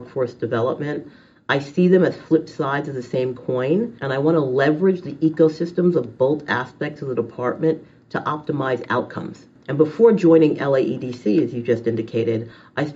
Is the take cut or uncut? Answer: cut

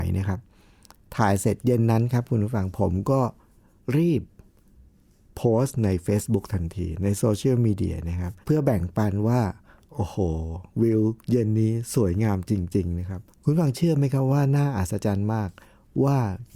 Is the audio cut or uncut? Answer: cut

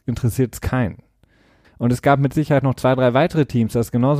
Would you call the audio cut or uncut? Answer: cut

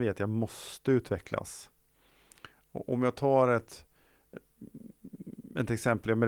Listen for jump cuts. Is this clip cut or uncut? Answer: uncut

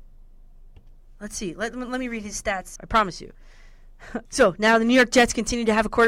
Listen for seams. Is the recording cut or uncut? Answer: cut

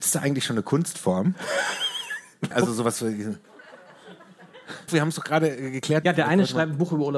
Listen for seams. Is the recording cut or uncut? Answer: cut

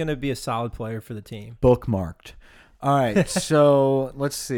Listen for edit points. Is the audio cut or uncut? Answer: uncut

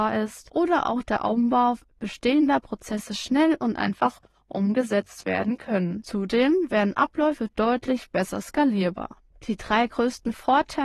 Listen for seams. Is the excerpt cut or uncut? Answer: uncut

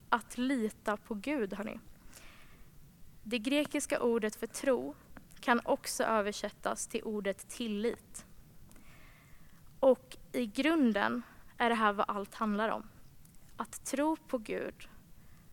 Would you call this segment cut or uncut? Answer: uncut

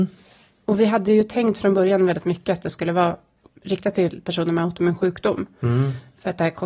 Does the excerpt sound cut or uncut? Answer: uncut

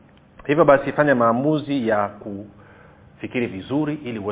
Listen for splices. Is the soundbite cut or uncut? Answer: uncut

